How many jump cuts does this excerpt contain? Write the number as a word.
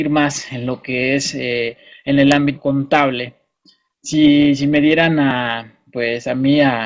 zero